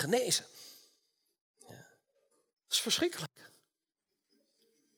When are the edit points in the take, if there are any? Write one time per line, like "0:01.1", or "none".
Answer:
0:02.6